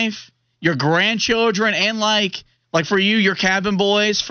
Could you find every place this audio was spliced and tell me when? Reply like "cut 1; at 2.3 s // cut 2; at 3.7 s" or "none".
none